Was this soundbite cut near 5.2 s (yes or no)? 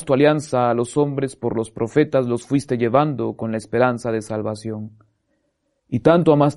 no